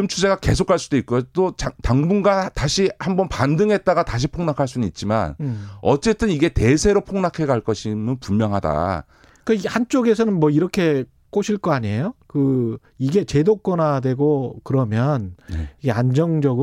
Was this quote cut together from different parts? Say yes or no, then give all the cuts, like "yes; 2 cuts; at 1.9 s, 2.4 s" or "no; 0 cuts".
no; 0 cuts